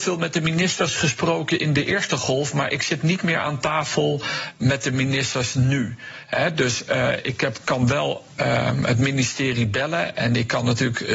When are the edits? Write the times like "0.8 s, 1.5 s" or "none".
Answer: 4.6 s